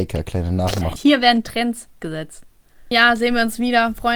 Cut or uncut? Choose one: cut